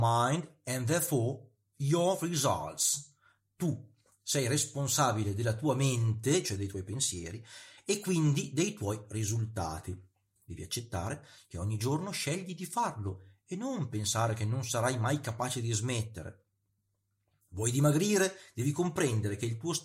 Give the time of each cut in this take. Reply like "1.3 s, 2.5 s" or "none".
10.4 s